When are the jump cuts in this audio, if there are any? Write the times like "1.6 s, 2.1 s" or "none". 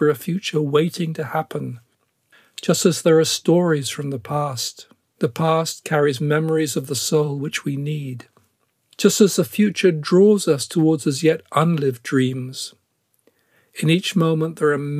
5.2 s